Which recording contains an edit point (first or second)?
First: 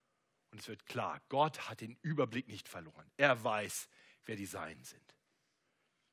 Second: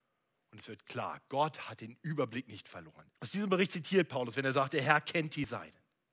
second